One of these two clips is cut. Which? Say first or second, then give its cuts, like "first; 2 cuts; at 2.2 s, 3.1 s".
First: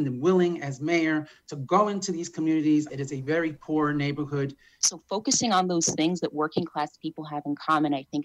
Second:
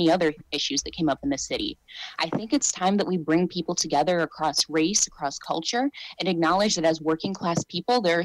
first; 2 cuts; at 2.9 s, 4.8 s